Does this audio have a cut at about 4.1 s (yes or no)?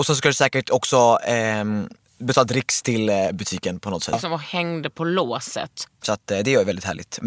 yes